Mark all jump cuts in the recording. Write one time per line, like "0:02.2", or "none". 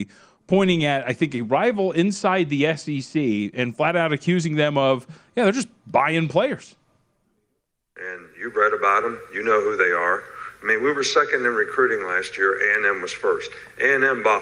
none